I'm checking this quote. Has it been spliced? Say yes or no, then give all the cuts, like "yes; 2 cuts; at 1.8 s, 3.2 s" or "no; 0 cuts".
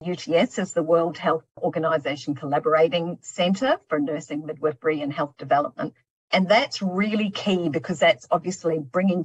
no; 0 cuts